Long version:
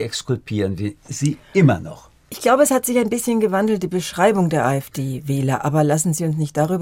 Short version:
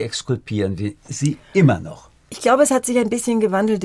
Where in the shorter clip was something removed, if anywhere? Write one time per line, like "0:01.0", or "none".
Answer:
none